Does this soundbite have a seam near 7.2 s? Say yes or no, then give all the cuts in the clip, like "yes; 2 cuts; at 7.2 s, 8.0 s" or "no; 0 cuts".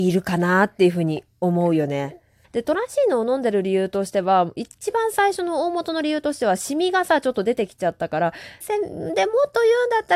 no; 2 cuts; at 2.4 s, 8.6 s